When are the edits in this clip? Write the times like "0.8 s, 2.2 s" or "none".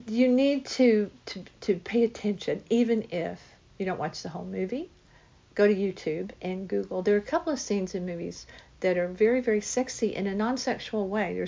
none